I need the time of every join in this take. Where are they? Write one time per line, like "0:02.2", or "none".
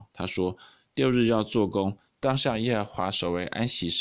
0:02.1